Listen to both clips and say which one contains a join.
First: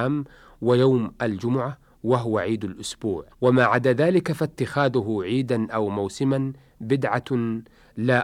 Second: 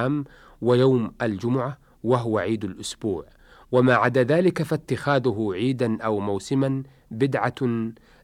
first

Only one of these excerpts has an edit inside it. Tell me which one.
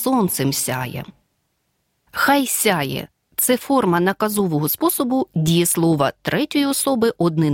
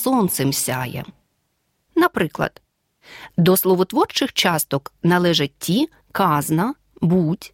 second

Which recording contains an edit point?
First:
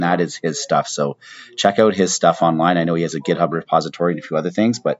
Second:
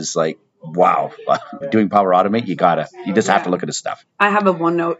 second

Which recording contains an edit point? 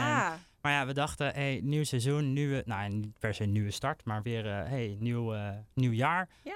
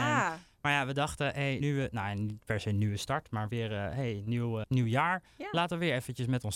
second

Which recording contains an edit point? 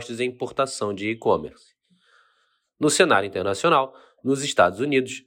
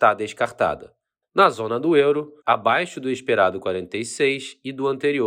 second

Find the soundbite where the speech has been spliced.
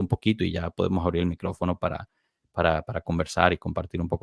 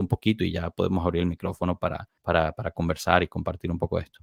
second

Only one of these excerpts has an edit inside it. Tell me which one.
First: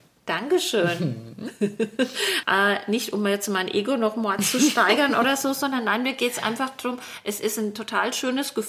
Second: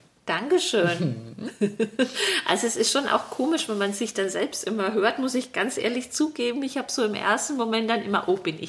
first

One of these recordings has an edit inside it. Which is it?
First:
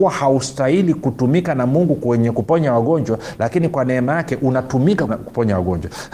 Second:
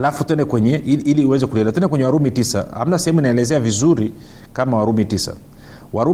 first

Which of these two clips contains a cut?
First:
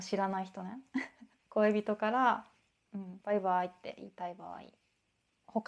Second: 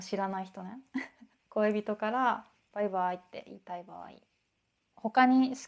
second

